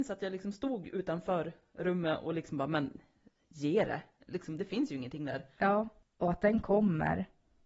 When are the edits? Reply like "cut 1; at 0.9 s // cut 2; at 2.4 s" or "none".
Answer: cut 1; at 4.6 s // cut 2; at 6.1 s